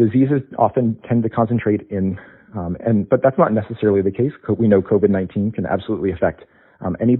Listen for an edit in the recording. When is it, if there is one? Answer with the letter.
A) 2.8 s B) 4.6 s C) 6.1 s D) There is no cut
A